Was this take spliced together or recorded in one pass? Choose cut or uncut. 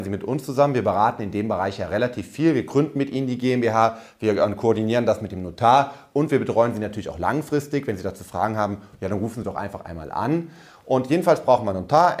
uncut